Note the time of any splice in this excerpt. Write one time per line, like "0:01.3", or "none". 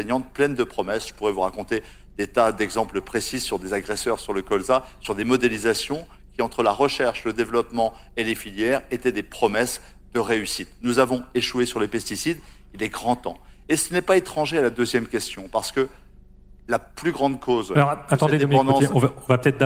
none